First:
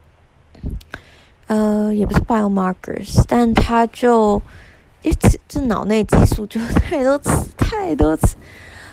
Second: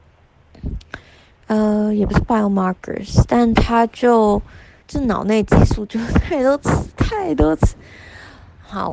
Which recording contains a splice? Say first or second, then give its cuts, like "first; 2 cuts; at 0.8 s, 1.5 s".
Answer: second; 1 cut; at 4.8 s